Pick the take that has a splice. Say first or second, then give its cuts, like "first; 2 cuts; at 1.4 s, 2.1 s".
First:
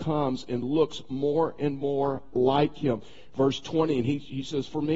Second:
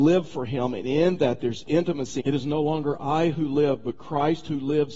second; 1 cut; at 2.2 s